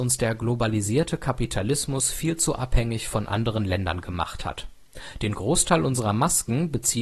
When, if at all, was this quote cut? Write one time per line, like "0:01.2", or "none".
none